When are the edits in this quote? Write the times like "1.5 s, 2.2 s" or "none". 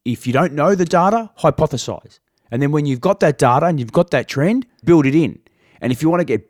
4.8 s